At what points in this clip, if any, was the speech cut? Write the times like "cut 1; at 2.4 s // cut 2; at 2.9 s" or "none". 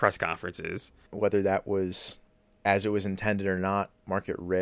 cut 1; at 1.1 s